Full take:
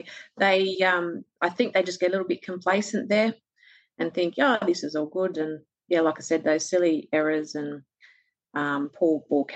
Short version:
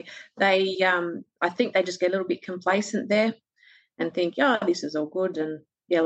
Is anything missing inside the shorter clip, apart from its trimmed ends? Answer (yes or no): no